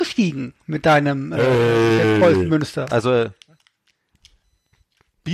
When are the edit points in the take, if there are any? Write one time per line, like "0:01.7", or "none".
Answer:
0:02.9

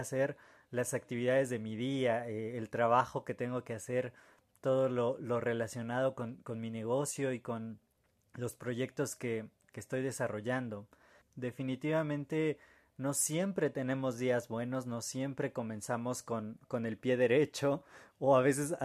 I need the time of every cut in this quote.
0:11.2

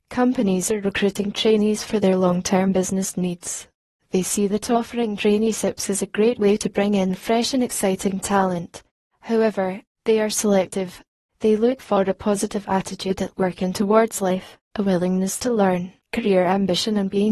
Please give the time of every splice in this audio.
none

